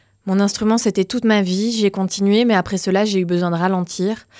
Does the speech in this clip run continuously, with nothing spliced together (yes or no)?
yes